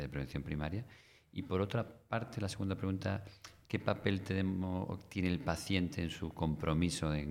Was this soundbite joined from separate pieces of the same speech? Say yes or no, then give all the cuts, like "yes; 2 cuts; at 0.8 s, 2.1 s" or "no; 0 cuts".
no; 0 cuts